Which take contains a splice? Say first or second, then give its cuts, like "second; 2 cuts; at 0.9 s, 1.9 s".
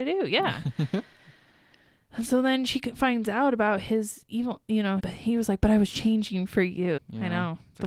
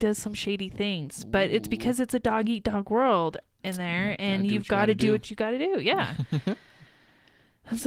first; 2 cuts; at 5.0 s, 7.0 s